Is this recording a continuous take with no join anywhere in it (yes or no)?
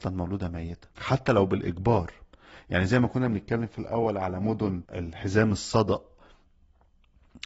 no